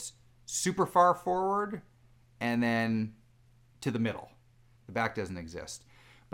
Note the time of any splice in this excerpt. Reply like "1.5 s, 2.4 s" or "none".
4.8 s